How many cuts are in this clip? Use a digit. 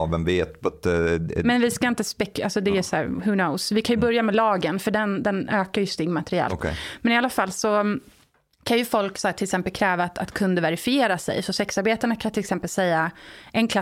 0